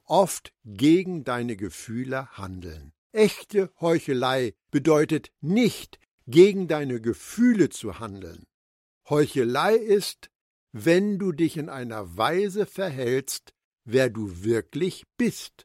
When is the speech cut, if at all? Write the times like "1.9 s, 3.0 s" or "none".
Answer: 3.0 s, 13.7 s